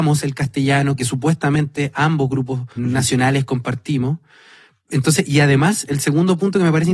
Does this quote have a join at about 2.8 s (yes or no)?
yes